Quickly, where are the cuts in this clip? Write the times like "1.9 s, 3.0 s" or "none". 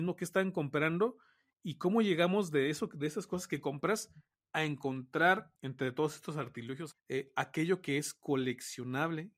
5.6 s, 6.9 s